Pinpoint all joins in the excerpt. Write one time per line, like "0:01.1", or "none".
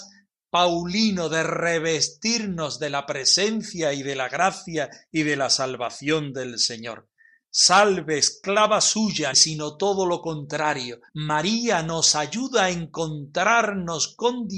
0:09.3
0:11.1